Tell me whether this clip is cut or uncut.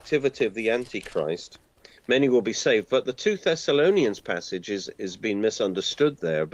cut